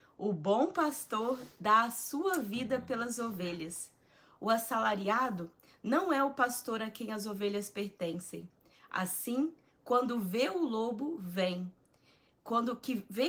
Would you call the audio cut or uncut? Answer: uncut